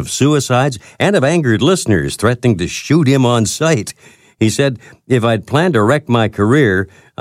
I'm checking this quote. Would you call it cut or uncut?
uncut